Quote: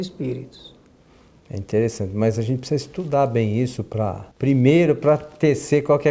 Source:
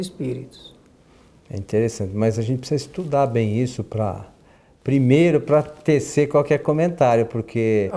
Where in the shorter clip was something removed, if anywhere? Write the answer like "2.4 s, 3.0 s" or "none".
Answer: 4.3 s